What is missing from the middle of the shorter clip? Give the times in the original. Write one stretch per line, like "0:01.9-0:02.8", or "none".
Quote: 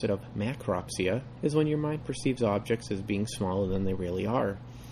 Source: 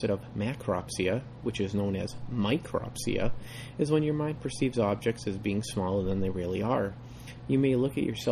0:01.4-0:03.7